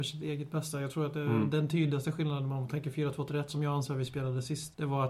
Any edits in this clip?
no; 0 cuts

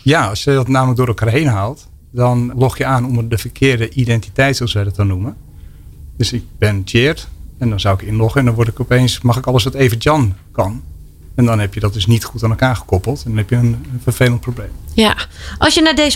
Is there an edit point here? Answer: yes; 1 cut; at 2.5 s

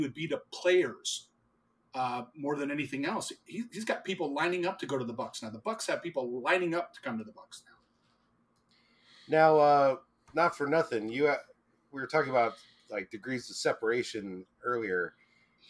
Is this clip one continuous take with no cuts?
yes; 0 cuts

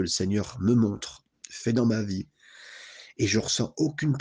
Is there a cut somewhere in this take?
no; 0 cuts

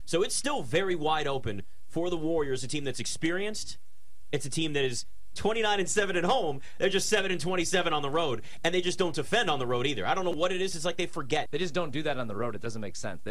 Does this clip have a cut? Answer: yes; 1 cut; at 11.5 s

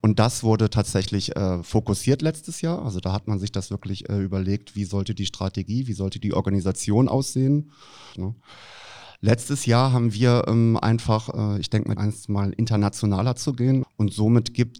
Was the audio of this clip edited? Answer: yes; 3 cuts; at 8.1 s, 12.0 s, 13.8 s

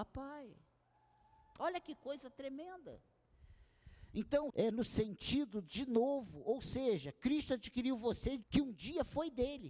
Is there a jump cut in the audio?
yes; 2 cuts; at 4.5 s, 8.4 s

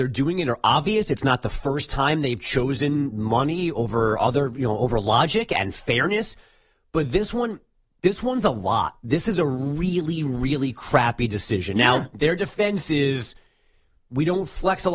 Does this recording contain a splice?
no; 0 cuts

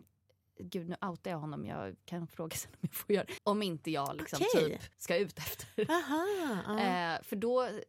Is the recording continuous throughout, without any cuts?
no; 2 cuts; at 3.4 s, 4.9 s

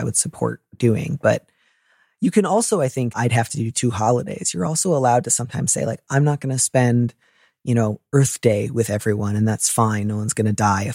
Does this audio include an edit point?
yes; 1 cut; at 3.1 s

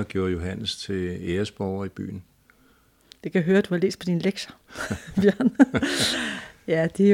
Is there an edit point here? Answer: no; 0 cuts

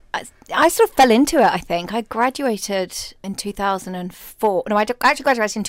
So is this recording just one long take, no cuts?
no; 1 cut; at 3.2 s

